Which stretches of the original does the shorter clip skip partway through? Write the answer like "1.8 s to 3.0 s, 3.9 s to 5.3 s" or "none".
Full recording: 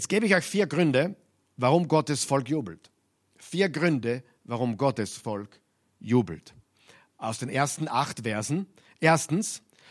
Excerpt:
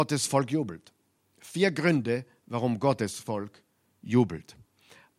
none